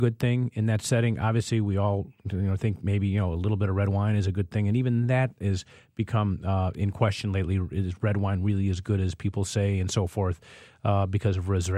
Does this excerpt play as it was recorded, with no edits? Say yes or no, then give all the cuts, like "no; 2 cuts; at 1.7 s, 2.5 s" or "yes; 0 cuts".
yes; 0 cuts